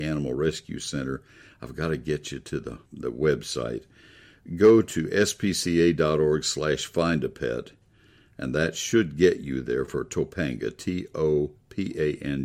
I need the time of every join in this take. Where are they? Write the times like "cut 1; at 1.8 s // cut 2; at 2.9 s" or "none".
cut 1; at 2.9 s